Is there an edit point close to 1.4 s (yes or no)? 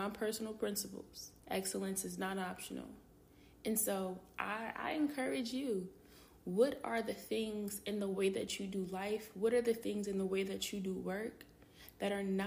yes